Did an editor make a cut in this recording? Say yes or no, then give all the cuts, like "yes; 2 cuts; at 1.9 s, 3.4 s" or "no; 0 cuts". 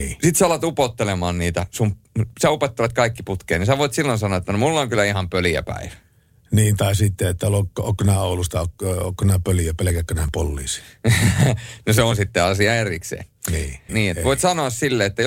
yes; 2 cuts; at 2.3 s, 13.9 s